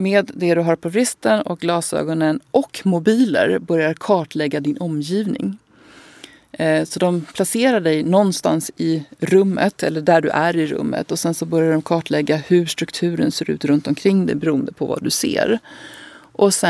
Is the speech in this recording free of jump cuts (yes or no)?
yes